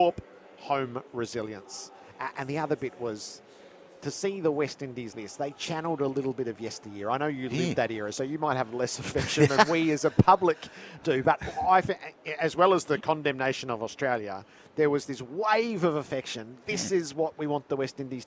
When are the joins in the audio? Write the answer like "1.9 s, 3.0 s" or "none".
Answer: 5.1 s